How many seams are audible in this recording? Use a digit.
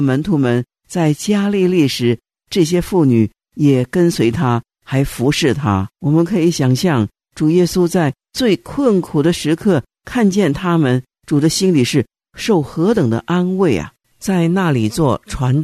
2